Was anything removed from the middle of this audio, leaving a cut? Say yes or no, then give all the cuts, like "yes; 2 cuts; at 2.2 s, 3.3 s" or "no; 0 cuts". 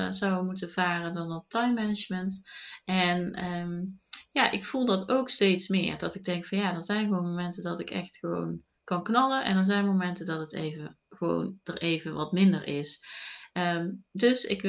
no; 0 cuts